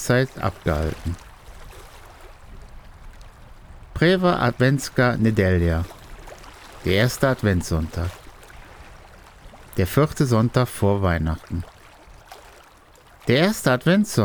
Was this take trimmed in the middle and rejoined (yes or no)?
no